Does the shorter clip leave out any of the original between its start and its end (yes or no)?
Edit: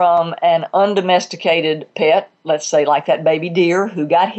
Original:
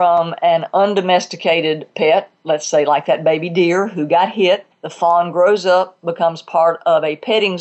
no